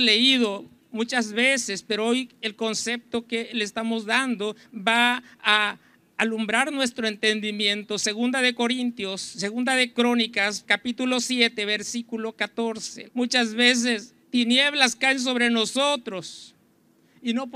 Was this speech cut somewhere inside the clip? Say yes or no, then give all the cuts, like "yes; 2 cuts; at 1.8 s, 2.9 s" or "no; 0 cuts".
yes; 3 cuts; at 10.6 s, 13.1 s, 14.2 s